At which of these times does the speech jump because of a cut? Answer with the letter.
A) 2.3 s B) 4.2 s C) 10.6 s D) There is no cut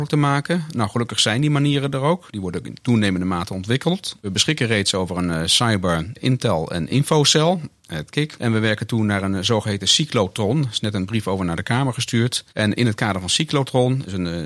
D